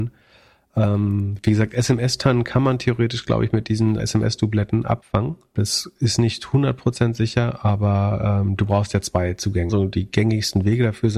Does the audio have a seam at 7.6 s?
no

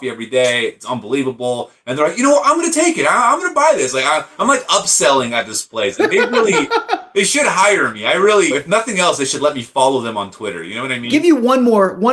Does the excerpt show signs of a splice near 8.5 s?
yes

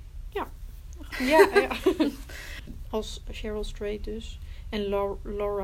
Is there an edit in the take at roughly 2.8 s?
yes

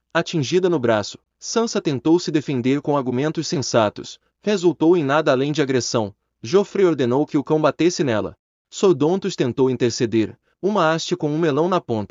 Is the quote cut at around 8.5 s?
no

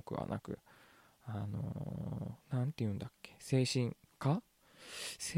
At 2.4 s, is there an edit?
yes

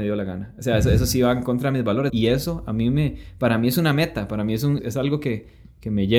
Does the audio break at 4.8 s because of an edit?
yes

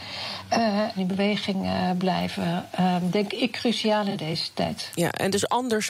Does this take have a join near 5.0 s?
no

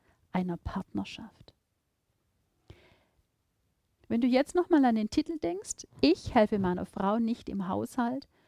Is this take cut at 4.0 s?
yes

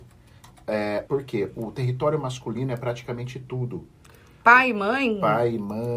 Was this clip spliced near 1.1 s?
yes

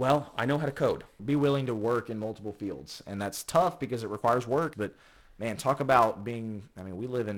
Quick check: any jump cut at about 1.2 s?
yes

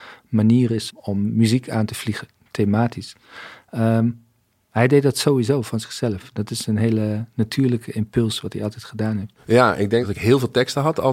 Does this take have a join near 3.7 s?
no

